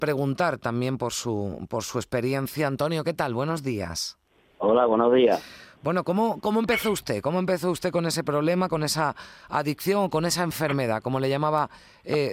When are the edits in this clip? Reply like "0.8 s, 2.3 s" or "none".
6.4 s